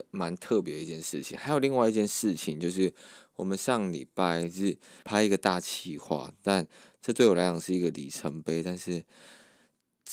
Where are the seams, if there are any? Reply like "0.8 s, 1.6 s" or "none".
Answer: 5.0 s